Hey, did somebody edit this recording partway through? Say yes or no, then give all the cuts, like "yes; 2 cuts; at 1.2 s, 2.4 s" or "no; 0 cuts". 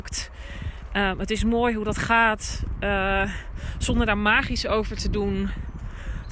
no; 0 cuts